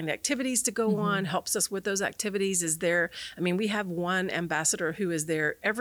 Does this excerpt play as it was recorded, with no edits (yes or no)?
yes